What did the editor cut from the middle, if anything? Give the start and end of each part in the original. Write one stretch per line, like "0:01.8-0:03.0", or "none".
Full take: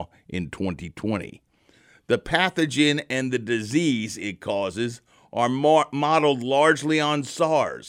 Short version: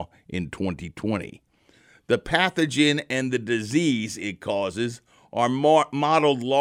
none